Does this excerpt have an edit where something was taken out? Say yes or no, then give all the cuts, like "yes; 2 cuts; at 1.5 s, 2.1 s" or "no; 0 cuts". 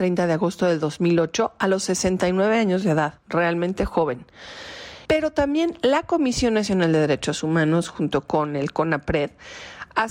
yes; 1 cut; at 5.1 s